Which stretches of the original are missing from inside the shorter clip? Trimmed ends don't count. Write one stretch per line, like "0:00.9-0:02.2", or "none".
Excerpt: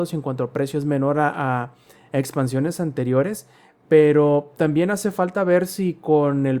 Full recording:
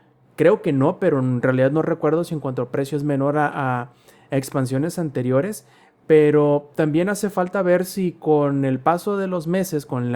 none